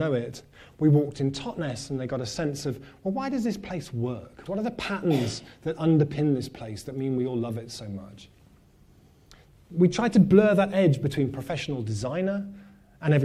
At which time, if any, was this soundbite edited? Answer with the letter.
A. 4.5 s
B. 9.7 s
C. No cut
A